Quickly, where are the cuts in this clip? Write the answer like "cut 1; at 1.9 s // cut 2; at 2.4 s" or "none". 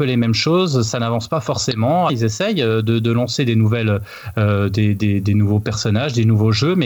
cut 1; at 2.1 s